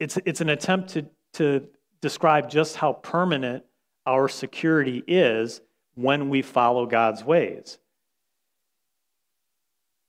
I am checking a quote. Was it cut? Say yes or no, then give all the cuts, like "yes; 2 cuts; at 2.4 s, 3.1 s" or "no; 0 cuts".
no; 0 cuts